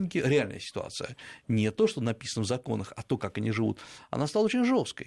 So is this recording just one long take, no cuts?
yes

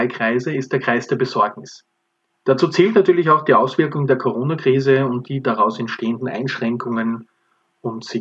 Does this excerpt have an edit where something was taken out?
yes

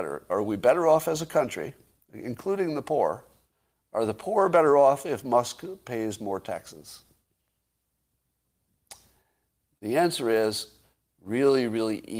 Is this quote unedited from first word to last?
yes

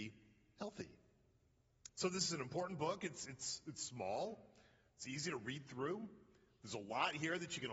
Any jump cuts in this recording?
no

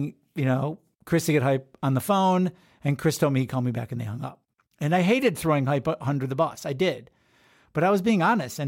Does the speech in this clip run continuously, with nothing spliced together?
yes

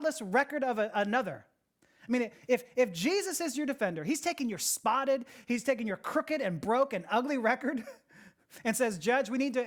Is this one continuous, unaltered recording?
yes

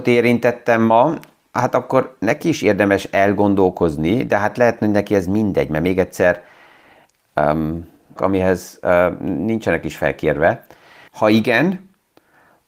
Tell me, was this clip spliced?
yes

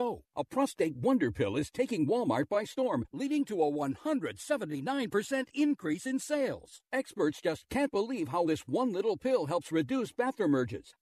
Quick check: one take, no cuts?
no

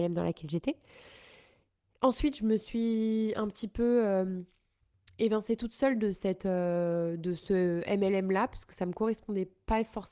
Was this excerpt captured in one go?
yes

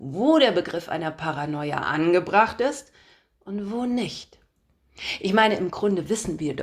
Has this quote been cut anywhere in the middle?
no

